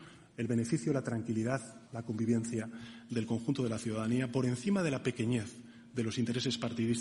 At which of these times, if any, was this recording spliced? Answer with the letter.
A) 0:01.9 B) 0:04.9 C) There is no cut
A